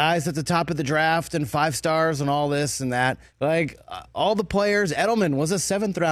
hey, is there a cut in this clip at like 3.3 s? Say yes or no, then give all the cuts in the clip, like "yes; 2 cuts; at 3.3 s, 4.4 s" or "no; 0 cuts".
yes; 1 cut; at 3.3 s